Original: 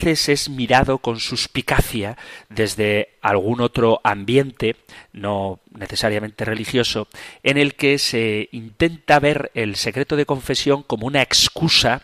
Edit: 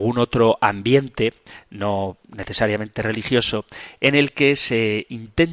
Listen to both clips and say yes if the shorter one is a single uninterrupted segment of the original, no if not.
yes